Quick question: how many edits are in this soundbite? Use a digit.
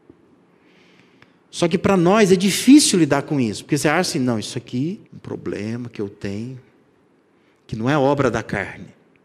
1